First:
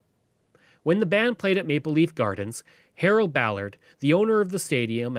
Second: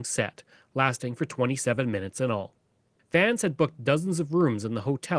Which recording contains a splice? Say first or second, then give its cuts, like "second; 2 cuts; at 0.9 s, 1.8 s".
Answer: second; 1 cut; at 3.0 s